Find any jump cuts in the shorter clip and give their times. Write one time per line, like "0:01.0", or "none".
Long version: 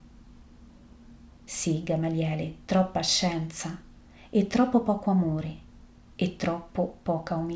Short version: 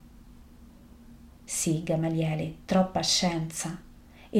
none